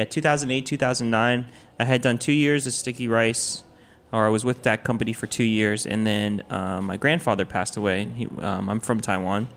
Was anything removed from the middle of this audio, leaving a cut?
no; 0 cuts

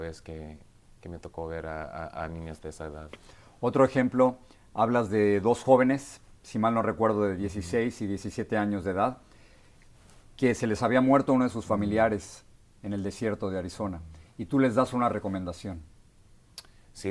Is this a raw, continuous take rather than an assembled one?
yes; 0 cuts

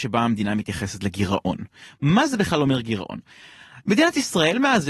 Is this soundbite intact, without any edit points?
yes; 0 cuts

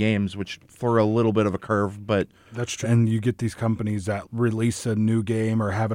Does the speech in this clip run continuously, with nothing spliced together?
no; 2 cuts; at 2.8 s, 4.2 s

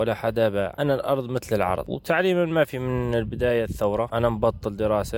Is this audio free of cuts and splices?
no; 1 cut; at 4.1 s

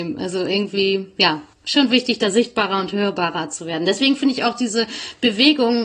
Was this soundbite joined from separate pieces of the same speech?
no; 0 cuts

